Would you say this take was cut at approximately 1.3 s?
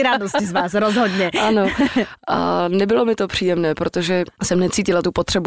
no; 0 cuts

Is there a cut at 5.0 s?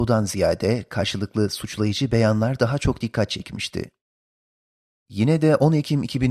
yes; 1 cut; at 5.0 s

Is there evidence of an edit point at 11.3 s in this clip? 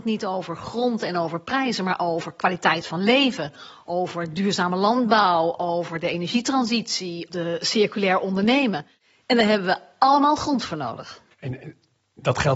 yes; 2 cuts; at 7.3 s, 11.3 s

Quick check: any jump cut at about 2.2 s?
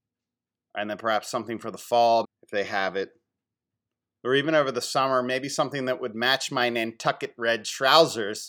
yes; 1 cut; at 2.2 s

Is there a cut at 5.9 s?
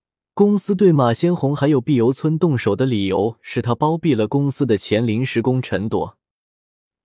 no; 0 cuts

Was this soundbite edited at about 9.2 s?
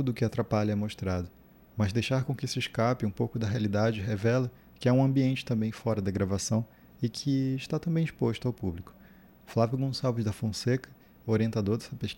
no; 0 cuts

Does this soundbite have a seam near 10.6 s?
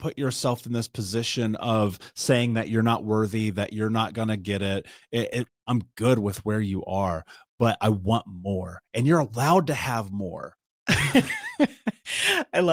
yes; 2 cuts; at 5.5 s, 10.6 s

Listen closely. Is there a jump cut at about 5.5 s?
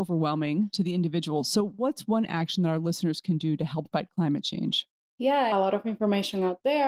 yes; 1 cut; at 5.5 s

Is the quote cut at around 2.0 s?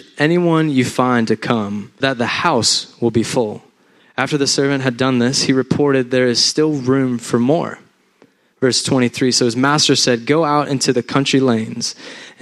yes; 2 cuts; at 2.0 s, 4.0 s

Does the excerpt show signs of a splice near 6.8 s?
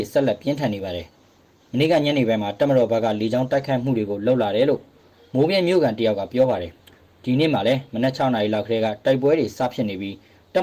yes; 1 cut; at 6.8 s

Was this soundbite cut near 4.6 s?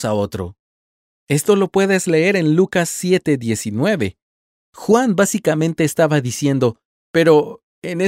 no; 1 cut; at 7.0 s

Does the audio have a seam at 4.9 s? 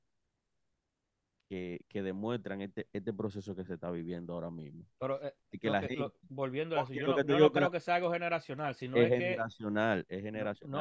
no; 0 cuts

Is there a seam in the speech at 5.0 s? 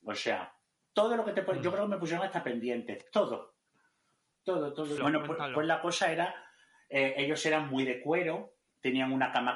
yes; 1 cut; at 5.0 s

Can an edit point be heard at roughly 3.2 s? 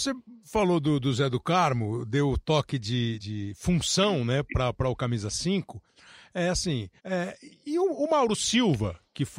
yes; 2 cuts; at 3.2 s, 7.0 s

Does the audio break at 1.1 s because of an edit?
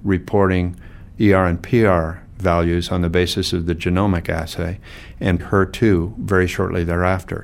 no; 1 cut; at 5.4 s

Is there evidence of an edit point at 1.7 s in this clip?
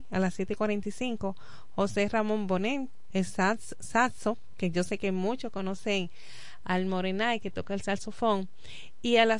no; 1 cut; at 3.1 s

